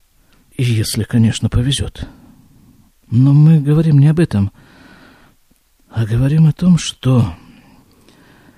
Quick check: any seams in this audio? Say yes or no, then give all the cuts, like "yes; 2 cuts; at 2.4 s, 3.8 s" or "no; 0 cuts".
yes; 1 cut; at 3.0 s